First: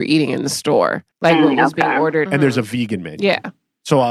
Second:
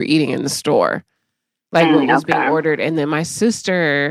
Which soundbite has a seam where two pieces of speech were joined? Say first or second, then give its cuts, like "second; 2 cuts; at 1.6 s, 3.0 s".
first; 2 cuts; at 1.1 s, 2.3 s